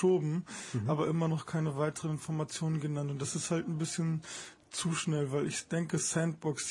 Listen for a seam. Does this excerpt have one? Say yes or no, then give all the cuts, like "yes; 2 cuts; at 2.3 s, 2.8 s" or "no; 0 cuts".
no; 0 cuts